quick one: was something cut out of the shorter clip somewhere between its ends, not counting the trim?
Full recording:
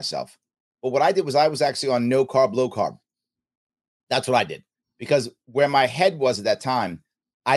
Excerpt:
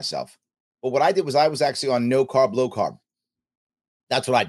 no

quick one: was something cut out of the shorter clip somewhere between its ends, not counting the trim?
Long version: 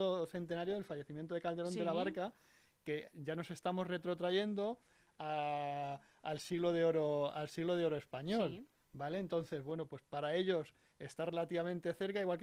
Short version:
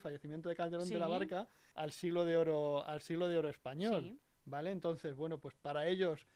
yes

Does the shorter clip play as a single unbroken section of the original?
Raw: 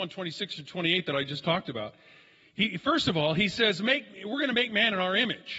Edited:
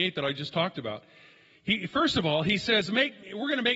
yes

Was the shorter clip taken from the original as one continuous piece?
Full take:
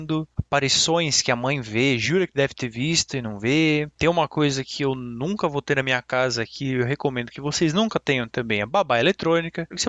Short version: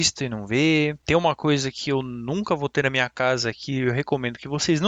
yes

